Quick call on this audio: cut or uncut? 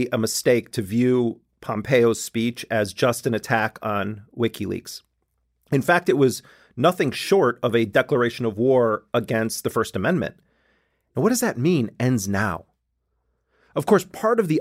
uncut